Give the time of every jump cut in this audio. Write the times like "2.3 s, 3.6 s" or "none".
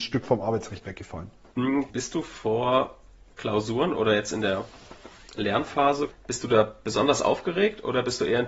1.9 s, 6.1 s